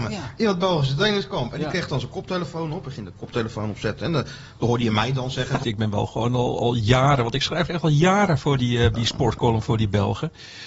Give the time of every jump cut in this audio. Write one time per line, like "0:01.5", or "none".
0:05.6
0:08.9